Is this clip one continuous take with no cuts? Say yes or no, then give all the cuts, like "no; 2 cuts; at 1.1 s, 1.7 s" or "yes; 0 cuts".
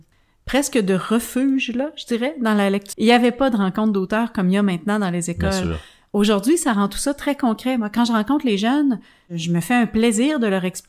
no; 1 cut; at 2.9 s